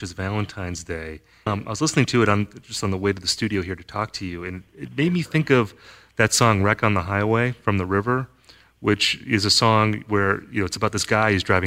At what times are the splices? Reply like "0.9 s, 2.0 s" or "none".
1.5 s

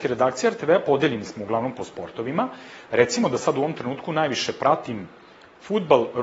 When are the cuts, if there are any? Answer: none

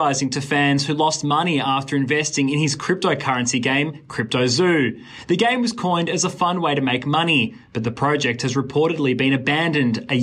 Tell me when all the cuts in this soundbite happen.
none

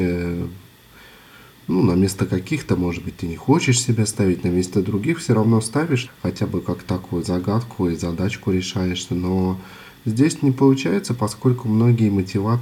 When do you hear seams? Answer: 6.1 s

